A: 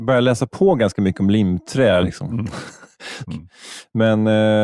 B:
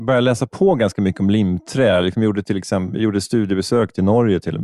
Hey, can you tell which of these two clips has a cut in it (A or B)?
A